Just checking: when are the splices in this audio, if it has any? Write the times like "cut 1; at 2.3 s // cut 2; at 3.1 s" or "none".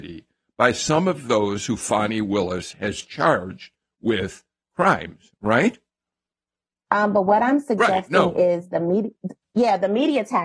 cut 1; at 6.9 s